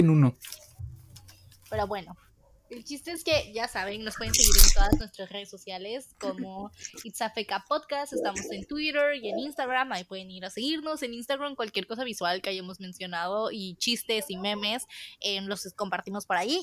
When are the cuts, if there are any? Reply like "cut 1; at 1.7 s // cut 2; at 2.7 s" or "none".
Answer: none